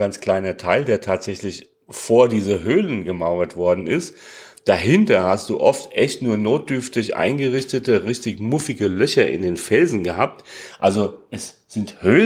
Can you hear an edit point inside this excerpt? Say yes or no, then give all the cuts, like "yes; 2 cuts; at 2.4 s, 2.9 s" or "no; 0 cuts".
no; 0 cuts